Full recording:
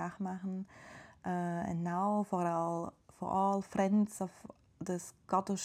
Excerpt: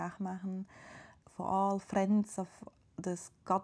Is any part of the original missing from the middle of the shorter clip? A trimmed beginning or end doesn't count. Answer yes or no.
yes